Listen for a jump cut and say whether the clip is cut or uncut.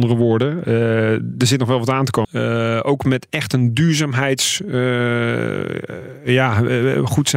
cut